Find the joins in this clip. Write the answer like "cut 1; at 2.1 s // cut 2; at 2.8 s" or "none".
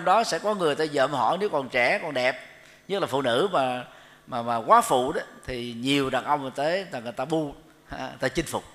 none